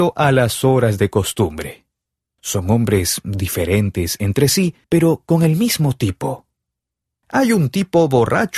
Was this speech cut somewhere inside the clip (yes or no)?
yes